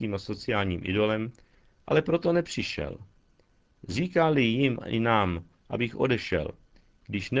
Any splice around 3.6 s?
no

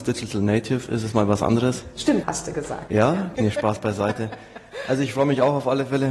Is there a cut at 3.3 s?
yes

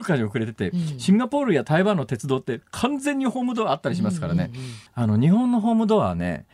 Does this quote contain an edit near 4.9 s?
yes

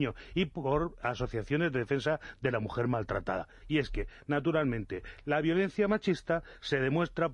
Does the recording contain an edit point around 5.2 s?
no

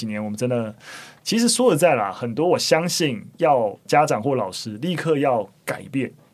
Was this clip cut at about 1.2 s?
yes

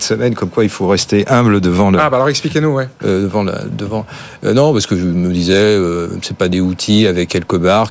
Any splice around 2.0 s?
no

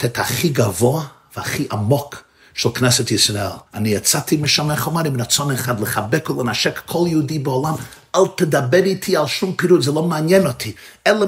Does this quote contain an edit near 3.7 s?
yes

